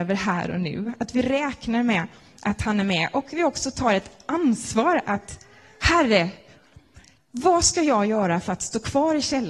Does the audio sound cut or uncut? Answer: uncut